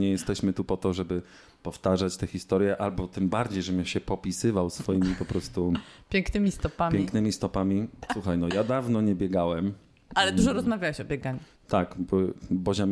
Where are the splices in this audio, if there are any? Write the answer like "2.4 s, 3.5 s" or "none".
8.1 s